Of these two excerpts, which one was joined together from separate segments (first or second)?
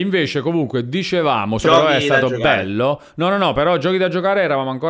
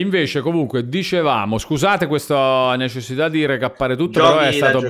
first